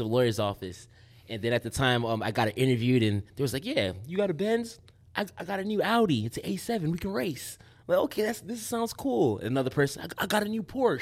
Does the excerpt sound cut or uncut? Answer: uncut